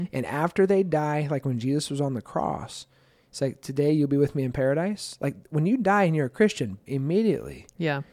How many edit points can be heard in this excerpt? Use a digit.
1